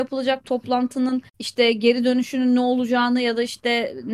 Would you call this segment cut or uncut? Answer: cut